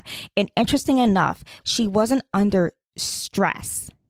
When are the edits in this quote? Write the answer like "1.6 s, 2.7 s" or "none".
1.6 s